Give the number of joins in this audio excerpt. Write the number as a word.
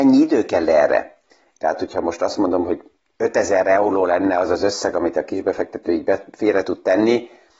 one